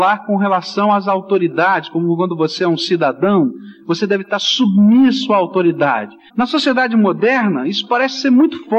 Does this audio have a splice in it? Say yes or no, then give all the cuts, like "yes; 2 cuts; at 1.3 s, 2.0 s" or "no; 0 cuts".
yes; 1 cut; at 6.3 s